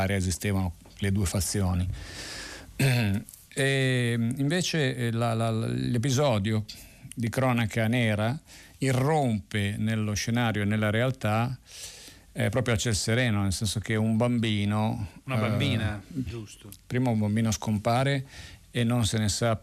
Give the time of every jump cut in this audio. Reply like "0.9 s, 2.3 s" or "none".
16.3 s